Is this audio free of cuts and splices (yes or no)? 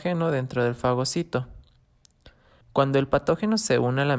no